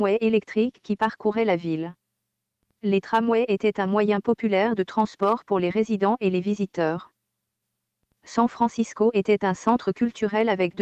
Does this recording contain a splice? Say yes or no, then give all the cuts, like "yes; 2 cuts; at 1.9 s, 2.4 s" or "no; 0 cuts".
no; 0 cuts